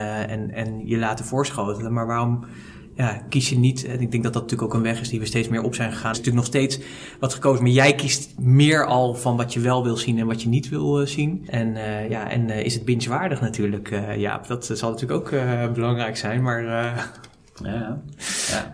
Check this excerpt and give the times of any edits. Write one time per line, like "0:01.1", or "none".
0:06.1
0:11.5